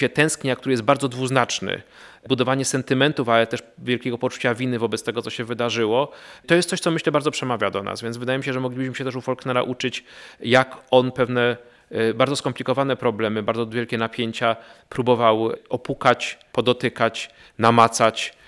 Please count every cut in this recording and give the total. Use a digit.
0